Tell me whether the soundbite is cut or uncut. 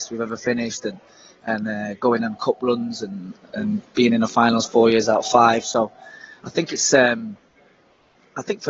uncut